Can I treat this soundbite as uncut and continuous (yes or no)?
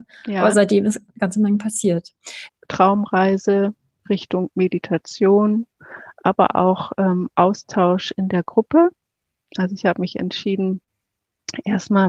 no